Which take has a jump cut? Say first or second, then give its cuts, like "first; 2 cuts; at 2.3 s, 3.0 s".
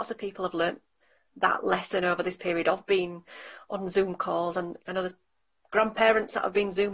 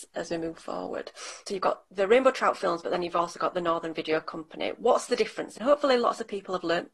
second; 1 cut; at 5.6 s